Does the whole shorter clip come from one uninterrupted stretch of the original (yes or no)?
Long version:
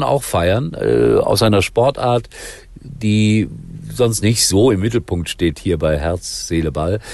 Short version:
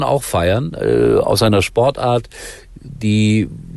yes